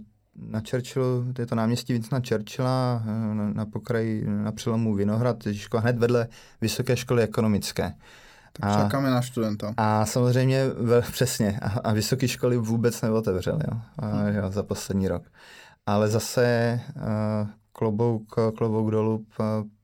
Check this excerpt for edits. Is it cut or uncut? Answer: uncut